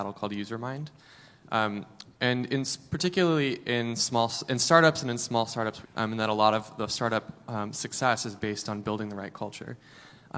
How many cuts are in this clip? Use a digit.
1